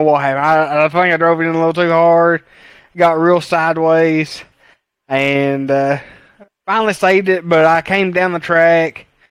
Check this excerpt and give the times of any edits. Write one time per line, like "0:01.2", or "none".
none